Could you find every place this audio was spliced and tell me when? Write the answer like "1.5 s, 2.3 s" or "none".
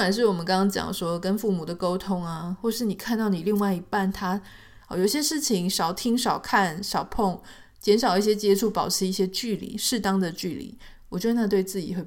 4.8 s

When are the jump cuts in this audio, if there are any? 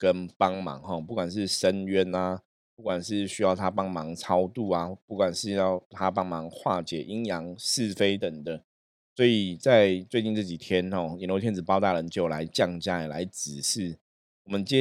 8.2 s

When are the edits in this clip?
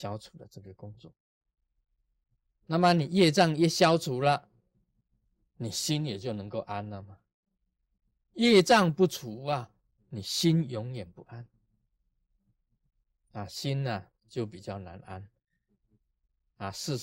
none

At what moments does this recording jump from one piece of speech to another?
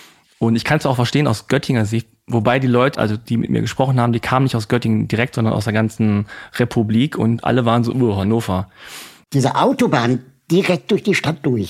2.9 s, 9.2 s

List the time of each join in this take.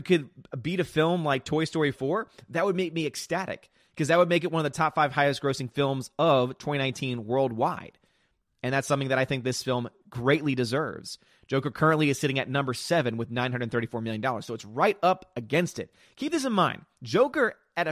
16.0 s

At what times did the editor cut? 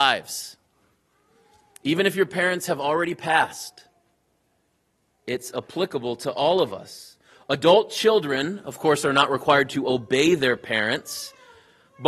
none

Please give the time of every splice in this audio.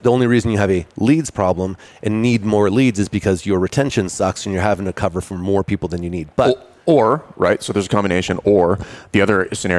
none

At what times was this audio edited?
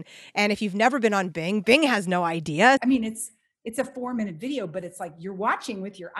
2.8 s

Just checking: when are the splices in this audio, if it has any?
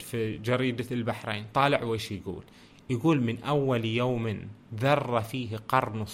none

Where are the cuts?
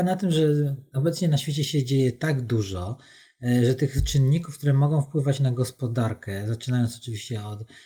none

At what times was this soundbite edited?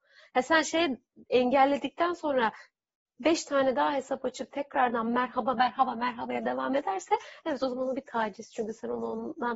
5.5 s

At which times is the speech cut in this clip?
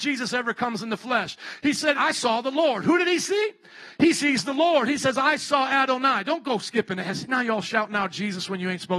1.9 s

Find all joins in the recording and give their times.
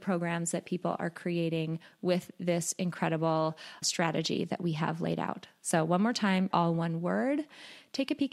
3.8 s, 6.5 s

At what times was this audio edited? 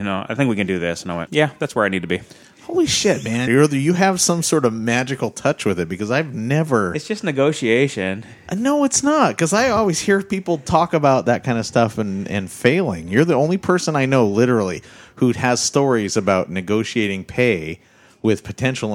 1.3 s, 3.5 s

